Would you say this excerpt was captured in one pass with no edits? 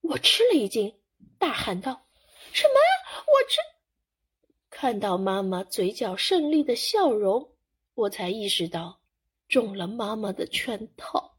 yes; 0 cuts

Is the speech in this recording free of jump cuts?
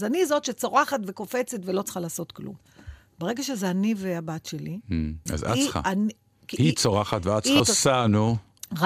no; 2 cuts; at 5.3 s, 7.6 s

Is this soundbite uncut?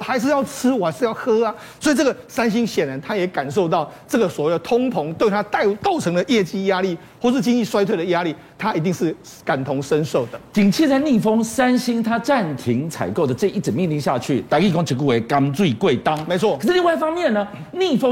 yes; 0 cuts

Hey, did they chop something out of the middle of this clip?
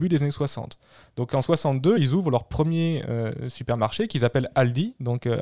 no; 0 cuts

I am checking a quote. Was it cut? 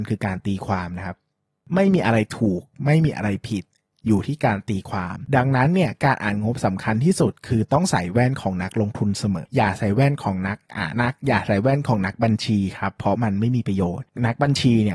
yes; 2 cuts; at 9.5 s, 10.9 s

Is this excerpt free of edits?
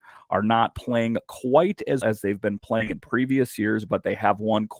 no; 1 cut; at 2.0 s

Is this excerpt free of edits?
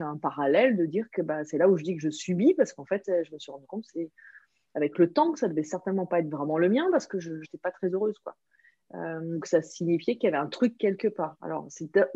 no; 3 cuts; at 3.0 s, 7.4 s, 9.4 s

